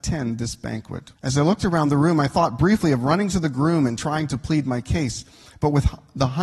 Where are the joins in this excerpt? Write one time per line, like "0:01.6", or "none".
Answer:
0:01.1

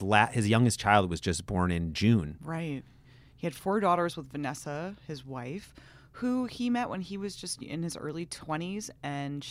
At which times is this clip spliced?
none

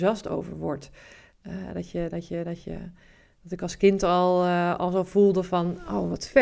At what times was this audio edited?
0:01.3

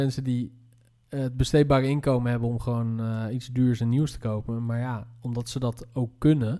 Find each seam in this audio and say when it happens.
none

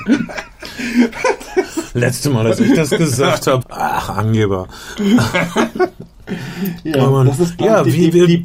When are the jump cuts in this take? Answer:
0:03.6

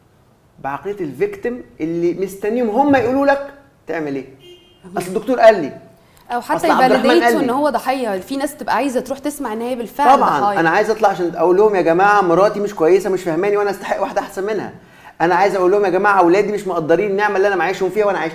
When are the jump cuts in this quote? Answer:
none

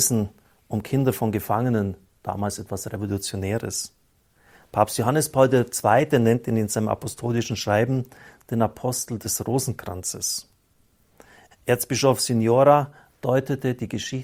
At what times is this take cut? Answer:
0:11.5

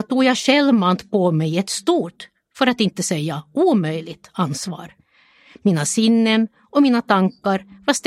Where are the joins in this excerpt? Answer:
none

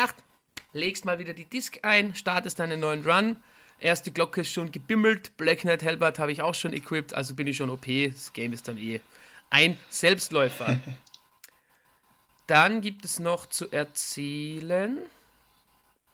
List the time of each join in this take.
none

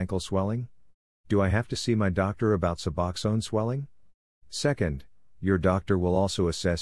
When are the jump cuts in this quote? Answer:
0:01.2
0:04.4

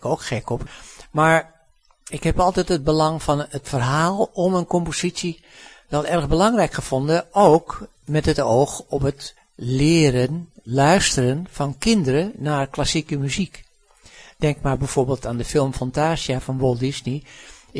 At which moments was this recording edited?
none

